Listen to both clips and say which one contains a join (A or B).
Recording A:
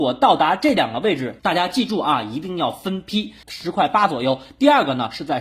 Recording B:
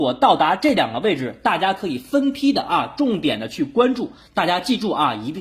A